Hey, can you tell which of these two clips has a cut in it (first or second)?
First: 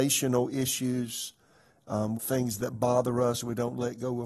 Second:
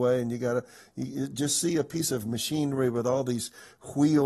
first